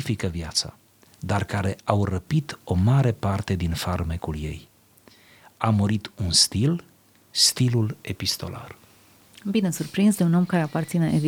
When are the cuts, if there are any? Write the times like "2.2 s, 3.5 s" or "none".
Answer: none